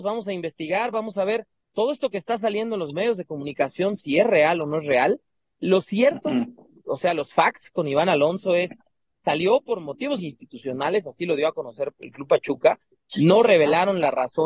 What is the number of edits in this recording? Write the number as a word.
zero